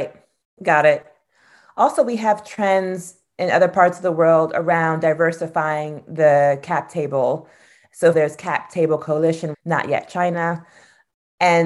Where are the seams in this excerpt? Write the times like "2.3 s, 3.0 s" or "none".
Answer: 8.1 s, 9.5 s